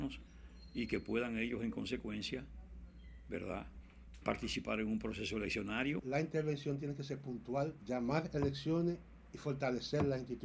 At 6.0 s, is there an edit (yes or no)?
no